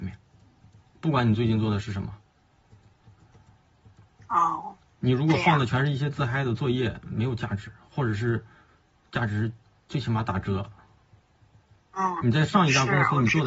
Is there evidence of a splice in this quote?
no; 0 cuts

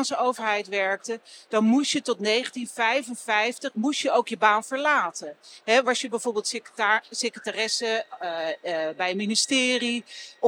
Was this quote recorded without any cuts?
no; 1 cut; at 8.2 s

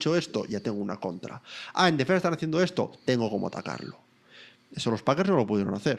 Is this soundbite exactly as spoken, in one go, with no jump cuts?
yes; 0 cuts

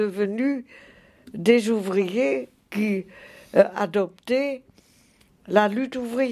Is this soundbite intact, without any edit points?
yes; 0 cuts

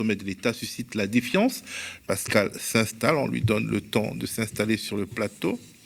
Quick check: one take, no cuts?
no; 1 cut; at 2.0 s

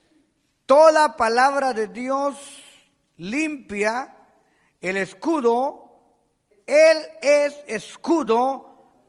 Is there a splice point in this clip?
yes; 1 cut; at 6.5 s

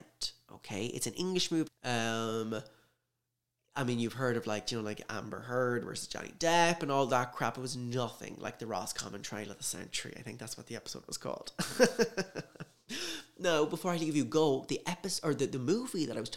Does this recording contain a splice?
yes; 1 cut; at 1.7 s

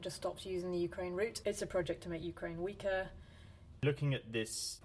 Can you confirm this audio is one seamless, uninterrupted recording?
no; 2 cuts; at 1.4 s, 3.8 s

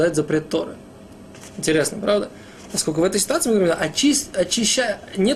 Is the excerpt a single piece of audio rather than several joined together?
yes; 0 cuts

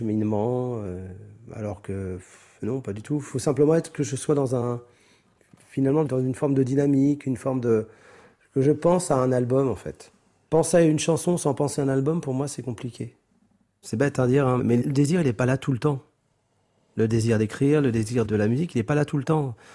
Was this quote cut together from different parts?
no; 0 cuts

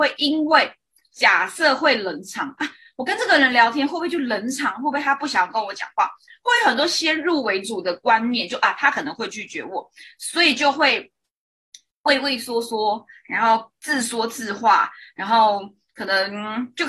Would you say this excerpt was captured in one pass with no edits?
yes; 0 cuts

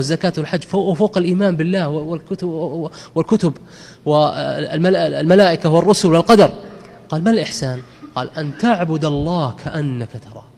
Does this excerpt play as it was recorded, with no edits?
yes; 0 cuts

